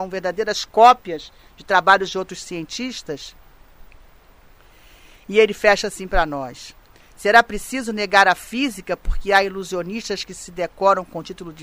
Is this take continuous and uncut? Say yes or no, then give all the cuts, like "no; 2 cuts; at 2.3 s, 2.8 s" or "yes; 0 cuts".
yes; 0 cuts